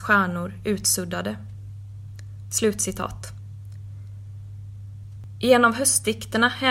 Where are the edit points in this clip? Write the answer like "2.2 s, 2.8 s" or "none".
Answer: none